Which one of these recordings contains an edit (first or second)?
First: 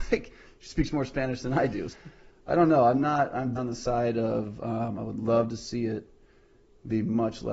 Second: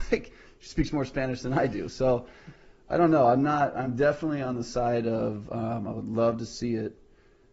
first